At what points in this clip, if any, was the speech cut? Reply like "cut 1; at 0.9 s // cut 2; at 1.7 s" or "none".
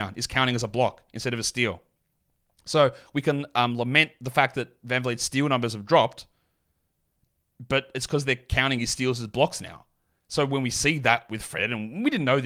none